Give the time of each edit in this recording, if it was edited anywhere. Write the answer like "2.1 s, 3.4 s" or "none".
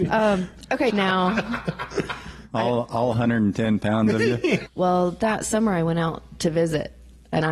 0.9 s, 4.7 s